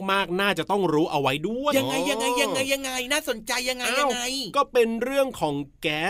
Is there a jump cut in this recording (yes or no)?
yes